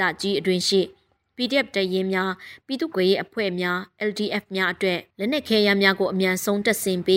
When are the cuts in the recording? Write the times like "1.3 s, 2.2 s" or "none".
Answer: 2.9 s, 5.1 s